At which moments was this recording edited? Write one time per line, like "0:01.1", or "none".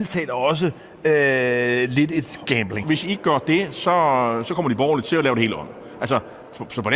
0:02.8